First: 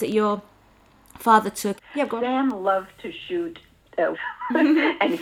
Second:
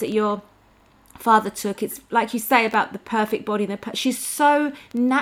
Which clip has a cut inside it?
first; 2 cuts; at 1.8 s, 4.1 s

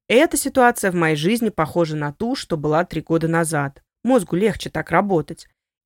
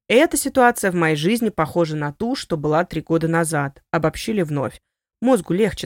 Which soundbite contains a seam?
first; 1 cut; at 3.9 s

